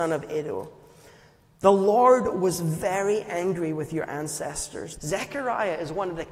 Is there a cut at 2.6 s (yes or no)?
no